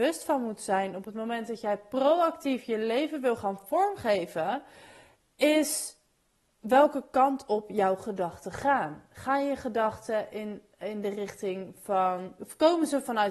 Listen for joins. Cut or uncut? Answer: uncut